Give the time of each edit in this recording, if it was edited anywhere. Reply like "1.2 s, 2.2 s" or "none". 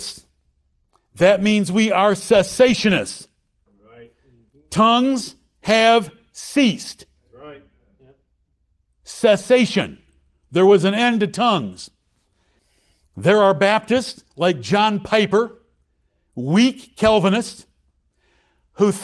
none